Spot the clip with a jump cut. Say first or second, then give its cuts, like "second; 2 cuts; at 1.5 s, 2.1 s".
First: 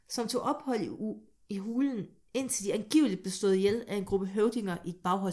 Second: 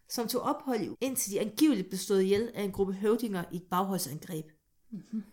second; 1 cut; at 0.9 s